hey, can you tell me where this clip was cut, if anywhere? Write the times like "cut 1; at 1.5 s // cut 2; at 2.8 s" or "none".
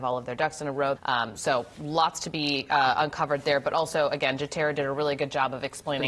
cut 1; at 1.0 s